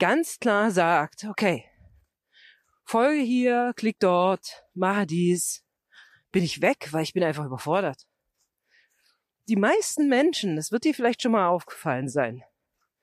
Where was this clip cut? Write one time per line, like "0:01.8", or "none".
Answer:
none